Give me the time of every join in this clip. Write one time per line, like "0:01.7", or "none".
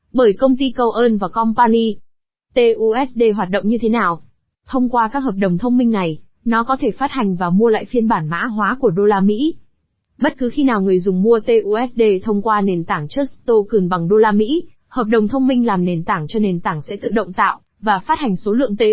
0:04.5